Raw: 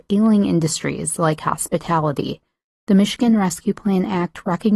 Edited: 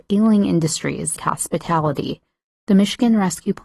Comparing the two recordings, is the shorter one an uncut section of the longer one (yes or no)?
no